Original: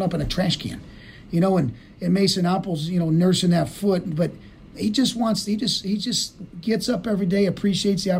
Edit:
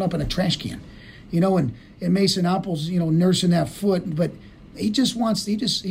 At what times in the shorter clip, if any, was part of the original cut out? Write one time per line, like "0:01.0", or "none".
none

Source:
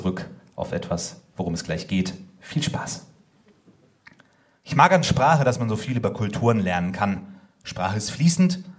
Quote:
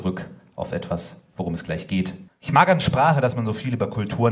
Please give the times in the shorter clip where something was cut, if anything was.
0:02.3

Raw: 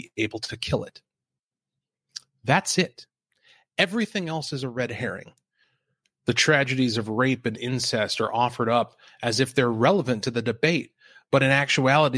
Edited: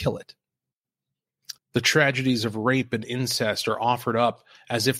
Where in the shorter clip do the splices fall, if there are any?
0:01.6

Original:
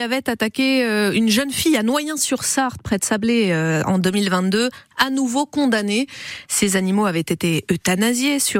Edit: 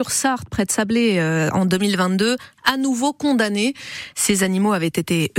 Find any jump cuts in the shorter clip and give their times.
none

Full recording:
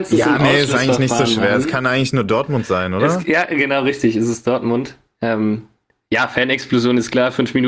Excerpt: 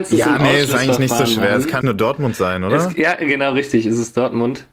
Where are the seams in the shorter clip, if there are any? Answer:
0:01.8

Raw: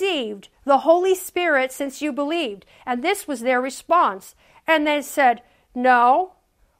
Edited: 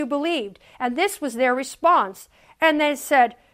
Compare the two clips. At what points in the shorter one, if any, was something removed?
none

